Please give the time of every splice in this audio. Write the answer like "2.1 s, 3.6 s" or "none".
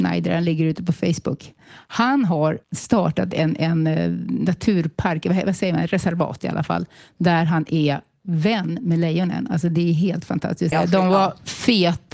2.6 s, 10.7 s